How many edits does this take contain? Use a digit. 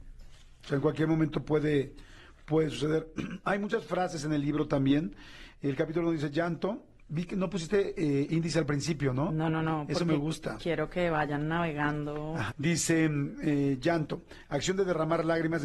1